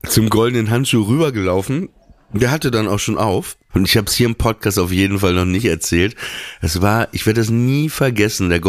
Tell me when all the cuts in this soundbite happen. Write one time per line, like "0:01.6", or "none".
0:03.7